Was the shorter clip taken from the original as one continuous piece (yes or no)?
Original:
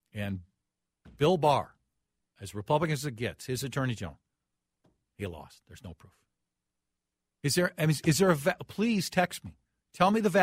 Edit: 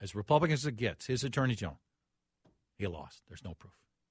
yes